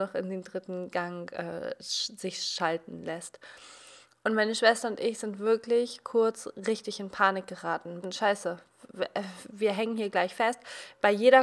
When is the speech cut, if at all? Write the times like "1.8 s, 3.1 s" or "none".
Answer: 8.0 s